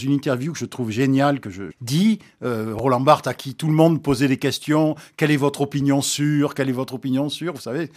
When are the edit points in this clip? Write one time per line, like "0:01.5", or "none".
0:01.7